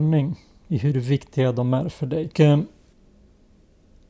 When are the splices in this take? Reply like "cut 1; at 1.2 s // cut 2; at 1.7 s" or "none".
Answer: cut 1; at 2.3 s